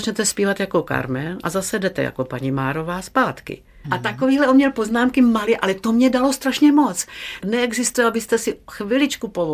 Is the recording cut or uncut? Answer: cut